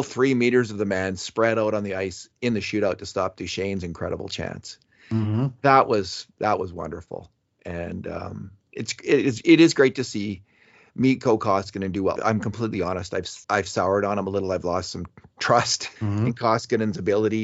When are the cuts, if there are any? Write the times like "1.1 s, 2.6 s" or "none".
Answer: 12.2 s, 13.4 s, 16.0 s